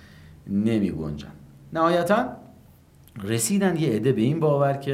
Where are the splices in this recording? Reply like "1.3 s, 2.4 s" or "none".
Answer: none